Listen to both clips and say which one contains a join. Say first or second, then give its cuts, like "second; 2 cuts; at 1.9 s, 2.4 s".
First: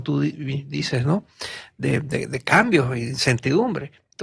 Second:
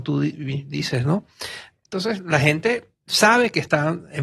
second; 1 cut; at 1.7 s